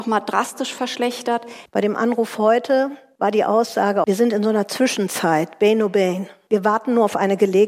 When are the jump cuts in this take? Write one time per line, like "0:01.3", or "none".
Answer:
0:01.7